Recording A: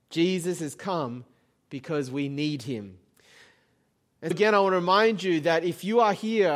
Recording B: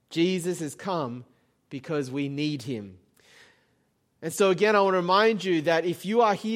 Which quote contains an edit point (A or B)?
A